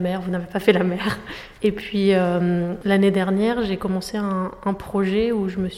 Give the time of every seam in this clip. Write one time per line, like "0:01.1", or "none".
0:01.6

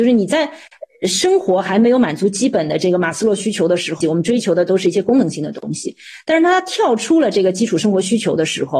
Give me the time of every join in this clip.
0:04.0

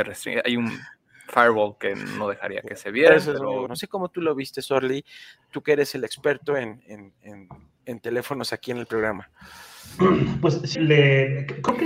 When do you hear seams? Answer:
0:03.7
0:10.7

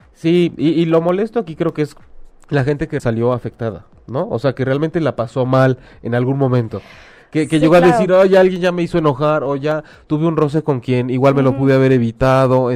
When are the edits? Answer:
0:03.0

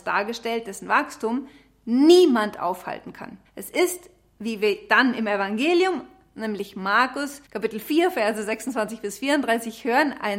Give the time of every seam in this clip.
0:03.5
0:07.5

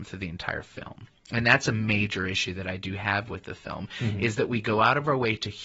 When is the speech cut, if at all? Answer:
none

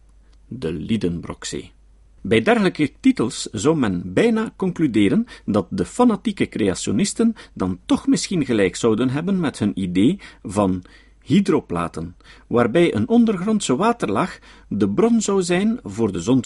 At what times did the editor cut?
0:02.2

